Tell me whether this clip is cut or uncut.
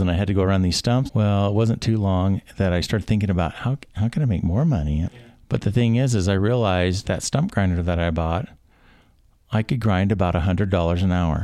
cut